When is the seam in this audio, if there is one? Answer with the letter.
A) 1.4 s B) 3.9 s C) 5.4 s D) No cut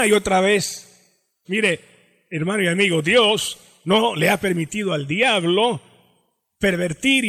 A